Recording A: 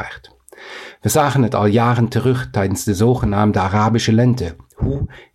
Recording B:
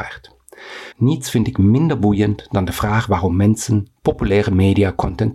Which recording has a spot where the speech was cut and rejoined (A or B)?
B